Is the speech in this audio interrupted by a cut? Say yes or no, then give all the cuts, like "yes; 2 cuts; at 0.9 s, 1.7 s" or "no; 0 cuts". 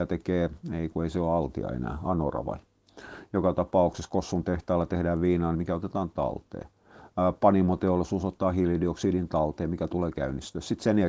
yes; 1 cut; at 5.5 s